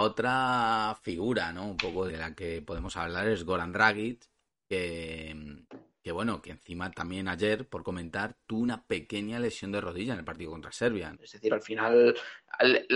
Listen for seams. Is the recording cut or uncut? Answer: cut